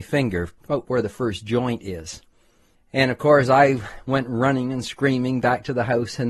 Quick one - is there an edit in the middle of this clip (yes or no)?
no